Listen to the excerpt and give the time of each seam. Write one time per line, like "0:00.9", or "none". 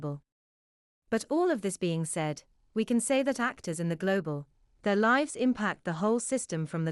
none